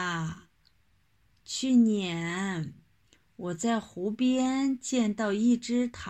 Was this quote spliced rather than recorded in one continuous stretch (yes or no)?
yes